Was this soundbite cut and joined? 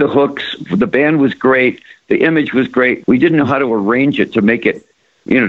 yes; 1 cut; at 3.0 s

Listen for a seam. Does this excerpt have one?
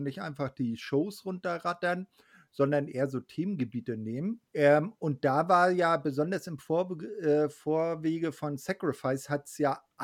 yes; 1 cut; at 4.5 s

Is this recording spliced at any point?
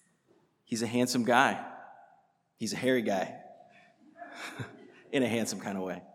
no; 0 cuts

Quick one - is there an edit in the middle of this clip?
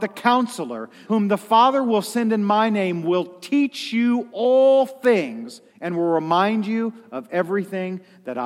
yes; 2 cuts; at 1.0 s, 5.7 s

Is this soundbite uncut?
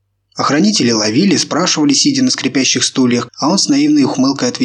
no; 1 cut; at 3.3 s

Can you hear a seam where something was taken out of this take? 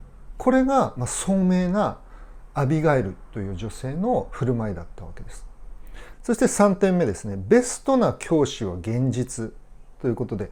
yes; 1 cut; at 6.1 s

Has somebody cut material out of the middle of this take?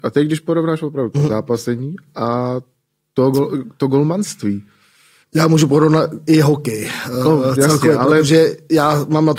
no; 0 cuts

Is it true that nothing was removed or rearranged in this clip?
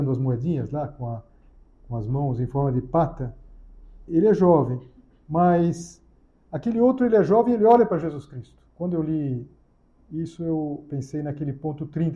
no; 2 cuts; at 4.1 s, 8.7 s

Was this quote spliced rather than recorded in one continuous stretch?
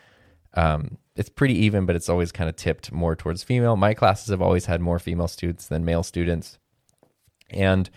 no; 0 cuts

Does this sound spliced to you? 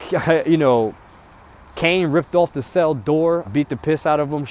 yes; 1 cut; at 3.4 s

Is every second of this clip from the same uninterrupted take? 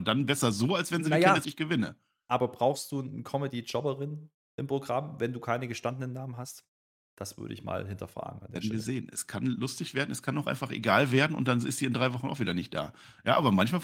no; 1 cut; at 1.4 s

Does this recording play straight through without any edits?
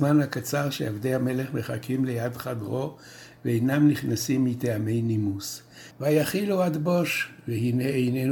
no; 1 cut; at 5.9 s

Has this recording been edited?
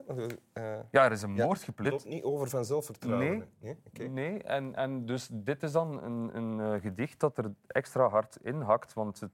yes; 1 cut; at 1.8 s

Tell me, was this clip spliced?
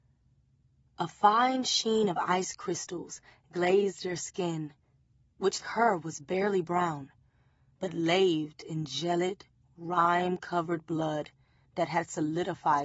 yes; 1 cut; at 5.6 s

